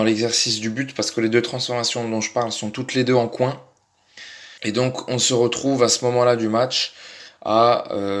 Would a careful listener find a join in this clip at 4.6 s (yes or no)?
yes